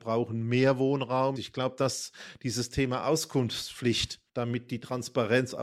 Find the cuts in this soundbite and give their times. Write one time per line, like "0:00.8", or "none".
0:01.4
0:04.3